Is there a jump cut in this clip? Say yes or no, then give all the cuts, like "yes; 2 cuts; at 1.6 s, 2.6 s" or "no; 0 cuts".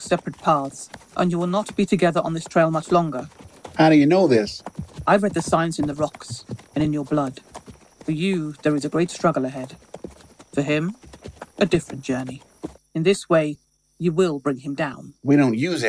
yes; 2 cuts; at 6.7 s, 12.8 s